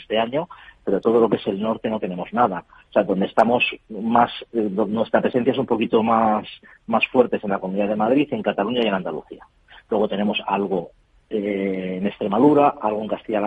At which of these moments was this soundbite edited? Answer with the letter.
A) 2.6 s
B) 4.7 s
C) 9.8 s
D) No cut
A